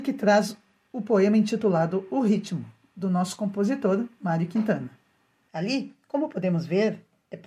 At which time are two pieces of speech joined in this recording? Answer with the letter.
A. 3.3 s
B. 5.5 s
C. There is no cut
B